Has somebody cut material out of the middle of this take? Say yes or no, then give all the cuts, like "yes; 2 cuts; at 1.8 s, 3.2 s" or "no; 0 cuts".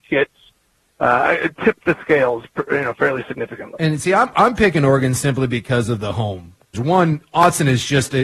yes; 1 cut; at 6.7 s